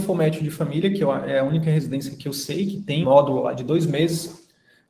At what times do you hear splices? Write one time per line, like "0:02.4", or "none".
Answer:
0:03.0